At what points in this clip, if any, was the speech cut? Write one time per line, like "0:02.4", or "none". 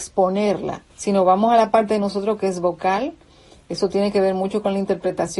0:00.9